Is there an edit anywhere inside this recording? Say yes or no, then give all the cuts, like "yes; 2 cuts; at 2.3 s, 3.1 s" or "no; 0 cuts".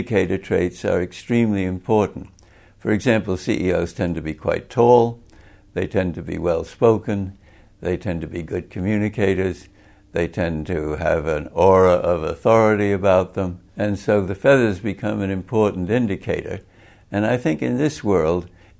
yes; 1 cut; at 13.7 s